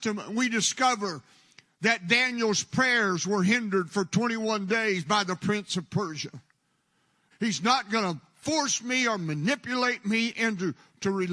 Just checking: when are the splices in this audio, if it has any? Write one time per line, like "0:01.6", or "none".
0:07.3